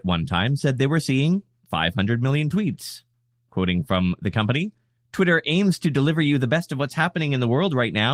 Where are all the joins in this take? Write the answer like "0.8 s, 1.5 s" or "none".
none